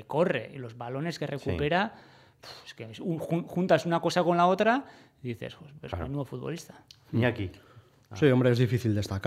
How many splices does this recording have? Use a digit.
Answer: 0